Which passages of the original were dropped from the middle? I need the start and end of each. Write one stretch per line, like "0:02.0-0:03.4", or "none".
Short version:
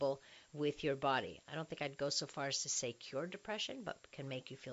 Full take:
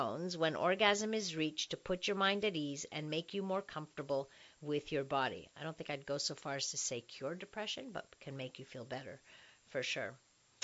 none